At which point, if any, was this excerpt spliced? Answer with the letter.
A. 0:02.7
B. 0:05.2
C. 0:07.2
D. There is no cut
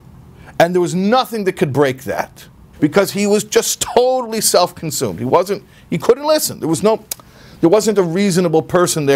A